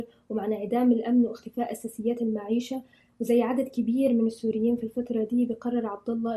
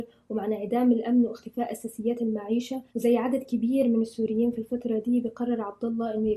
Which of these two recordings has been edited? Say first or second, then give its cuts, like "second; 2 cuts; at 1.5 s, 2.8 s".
second; 1 cut; at 2.9 s